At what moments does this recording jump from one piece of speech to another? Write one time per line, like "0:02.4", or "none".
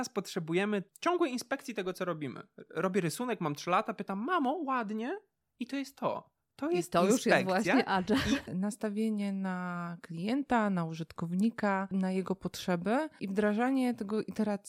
0:08.4